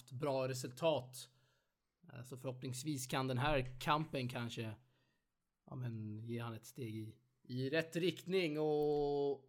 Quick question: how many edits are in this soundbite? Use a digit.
0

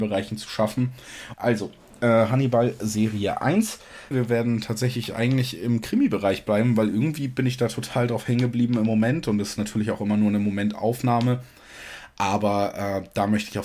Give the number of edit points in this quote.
2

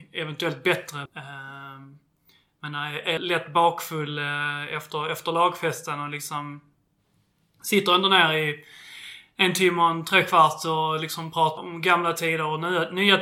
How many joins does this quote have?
3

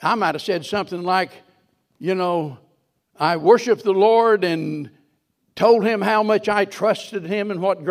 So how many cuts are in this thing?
0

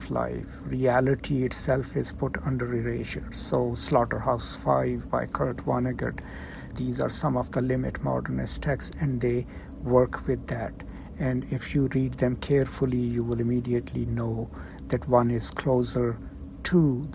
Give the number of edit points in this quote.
1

